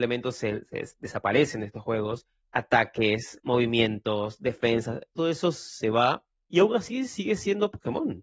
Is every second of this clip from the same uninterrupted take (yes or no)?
yes